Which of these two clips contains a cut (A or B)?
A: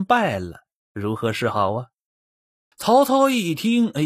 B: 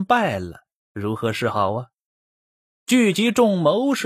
A